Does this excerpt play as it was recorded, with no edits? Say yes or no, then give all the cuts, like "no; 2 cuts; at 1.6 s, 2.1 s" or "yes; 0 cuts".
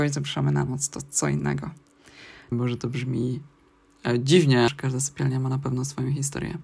no; 2 cuts; at 2.5 s, 4.7 s